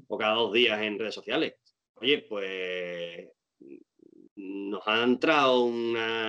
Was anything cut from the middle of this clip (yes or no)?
yes